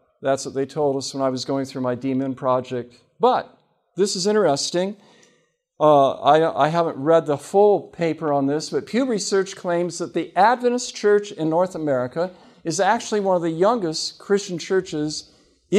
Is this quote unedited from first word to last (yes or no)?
yes